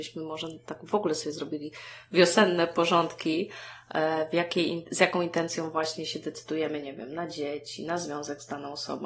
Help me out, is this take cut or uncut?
uncut